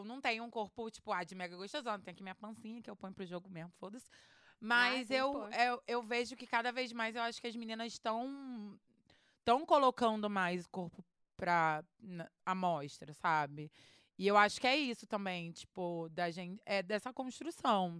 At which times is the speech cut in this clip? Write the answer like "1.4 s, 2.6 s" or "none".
none

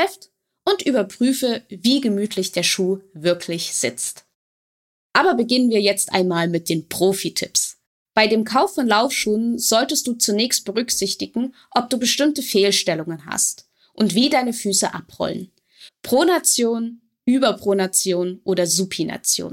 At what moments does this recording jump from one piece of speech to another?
15.9 s

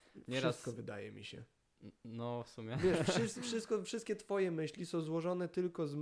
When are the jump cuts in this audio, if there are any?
none

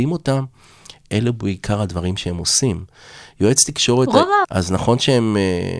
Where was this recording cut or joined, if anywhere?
4.4 s

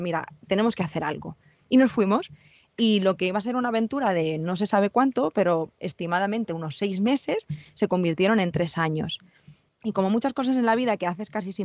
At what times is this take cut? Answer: 9.7 s

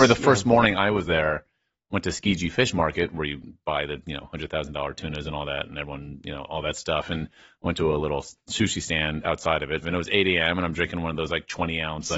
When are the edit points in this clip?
3.1 s, 9.8 s

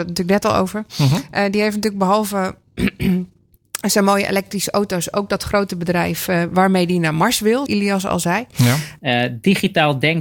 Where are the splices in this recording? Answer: 7.7 s, 9.0 s

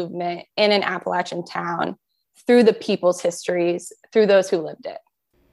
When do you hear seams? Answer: none

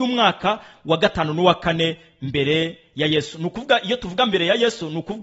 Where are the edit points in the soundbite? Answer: none

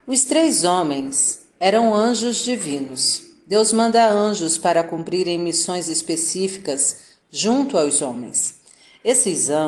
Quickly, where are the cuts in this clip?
none

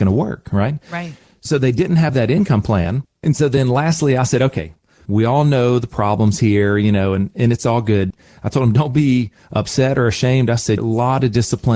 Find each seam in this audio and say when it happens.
5.1 s, 10.8 s

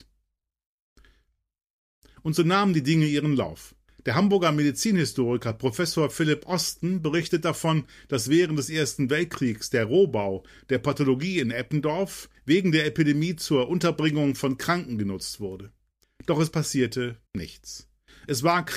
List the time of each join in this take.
12.3 s, 16.0 s, 17.3 s

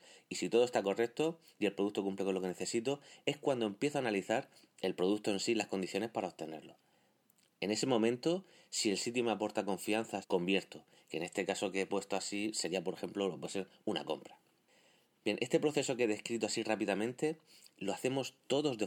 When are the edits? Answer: 10.2 s

